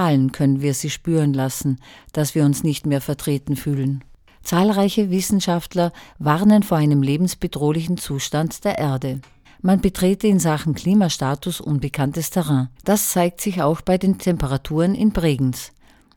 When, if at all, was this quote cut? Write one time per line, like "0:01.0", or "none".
0:09.4
0:12.8

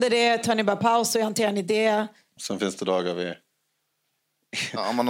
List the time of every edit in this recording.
0:02.4

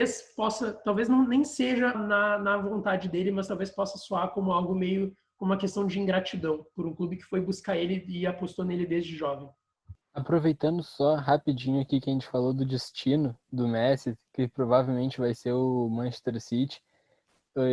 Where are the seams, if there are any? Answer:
0:01.9
0:10.0

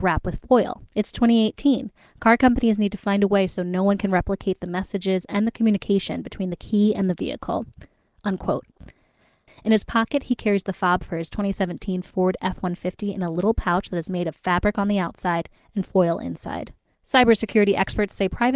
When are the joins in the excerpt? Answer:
0:09.5

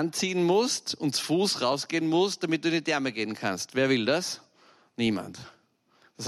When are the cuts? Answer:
none

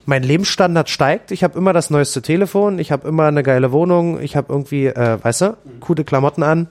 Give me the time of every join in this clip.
none

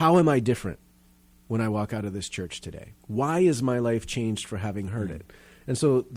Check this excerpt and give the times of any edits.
0:03.0

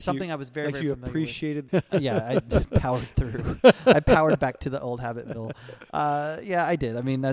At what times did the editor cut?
0:01.7

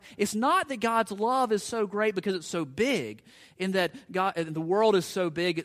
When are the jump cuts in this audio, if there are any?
none

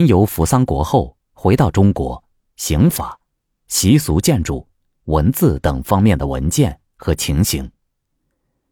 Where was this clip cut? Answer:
0:02.4

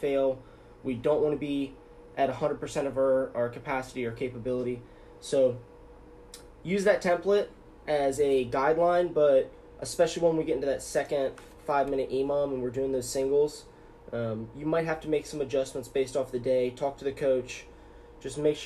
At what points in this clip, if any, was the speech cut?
none

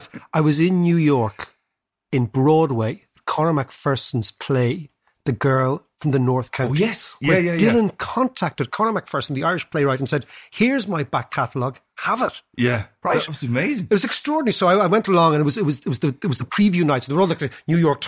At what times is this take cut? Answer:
none

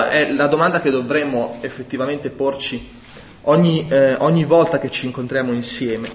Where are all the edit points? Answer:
none

